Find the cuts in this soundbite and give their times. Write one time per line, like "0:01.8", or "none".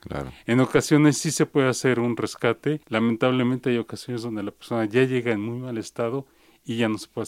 0:02.8